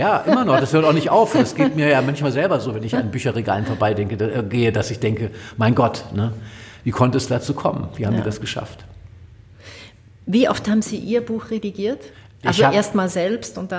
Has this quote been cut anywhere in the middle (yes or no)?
no